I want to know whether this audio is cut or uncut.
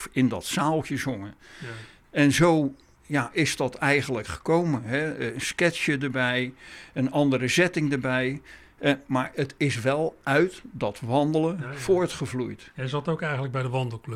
uncut